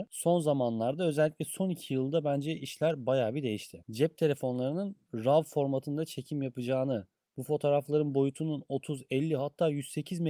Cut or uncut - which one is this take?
uncut